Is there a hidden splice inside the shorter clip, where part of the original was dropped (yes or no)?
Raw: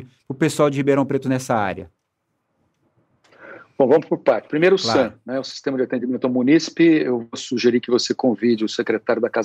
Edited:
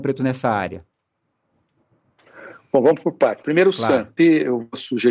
yes